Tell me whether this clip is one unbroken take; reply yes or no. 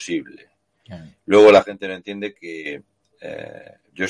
yes